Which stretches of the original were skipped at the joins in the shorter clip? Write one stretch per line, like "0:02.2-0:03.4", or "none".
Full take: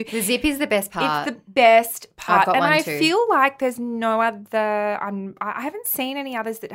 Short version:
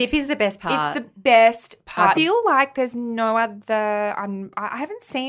0:02.5-0:03.0